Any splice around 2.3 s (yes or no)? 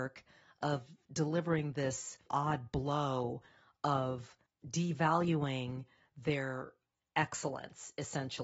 yes